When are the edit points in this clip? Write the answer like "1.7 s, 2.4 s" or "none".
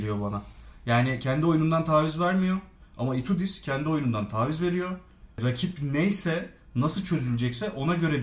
none